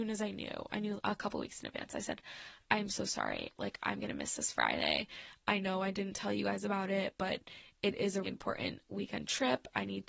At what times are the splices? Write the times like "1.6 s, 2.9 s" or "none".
1.0 s, 8.2 s